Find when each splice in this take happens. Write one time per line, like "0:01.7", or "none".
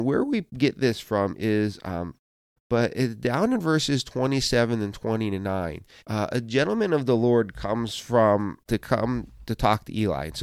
0:02.6
0:06.0
0:08.7